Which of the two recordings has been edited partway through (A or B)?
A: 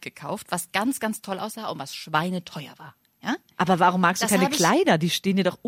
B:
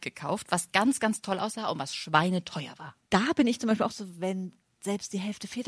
B